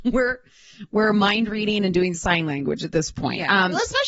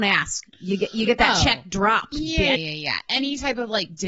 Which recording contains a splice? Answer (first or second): second